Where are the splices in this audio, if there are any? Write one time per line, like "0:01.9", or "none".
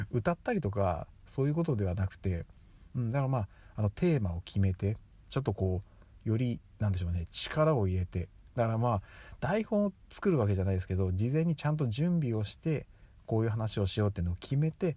0:05.3